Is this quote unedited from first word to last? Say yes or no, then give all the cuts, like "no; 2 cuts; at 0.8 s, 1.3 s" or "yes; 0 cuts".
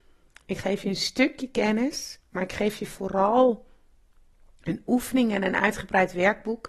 yes; 0 cuts